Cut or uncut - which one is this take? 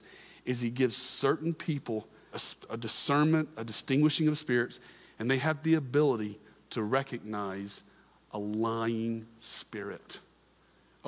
cut